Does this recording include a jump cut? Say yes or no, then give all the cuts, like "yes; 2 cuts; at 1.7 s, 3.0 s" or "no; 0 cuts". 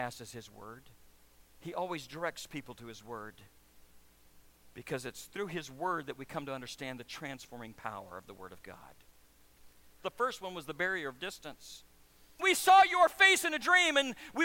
yes; 2 cuts; at 10.0 s, 12.4 s